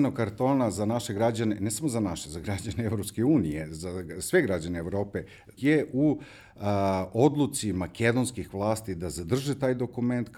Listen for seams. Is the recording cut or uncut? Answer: cut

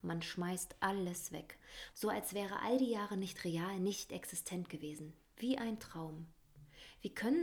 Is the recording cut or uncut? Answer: cut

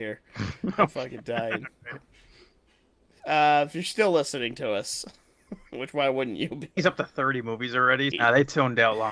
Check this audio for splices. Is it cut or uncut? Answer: cut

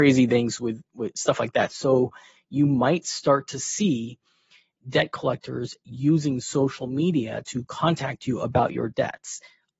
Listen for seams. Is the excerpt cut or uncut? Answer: cut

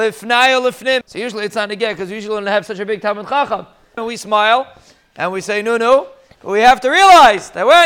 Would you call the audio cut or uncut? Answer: cut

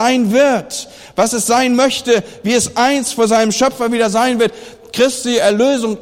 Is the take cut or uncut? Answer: uncut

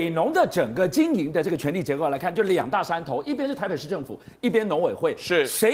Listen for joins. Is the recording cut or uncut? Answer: uncut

